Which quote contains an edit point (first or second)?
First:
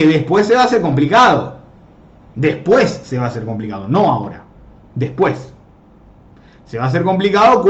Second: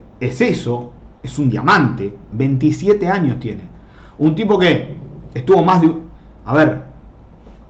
second